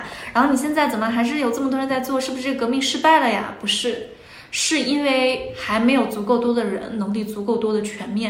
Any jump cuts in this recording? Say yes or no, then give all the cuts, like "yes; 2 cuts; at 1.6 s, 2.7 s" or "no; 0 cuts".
no; 0 cuts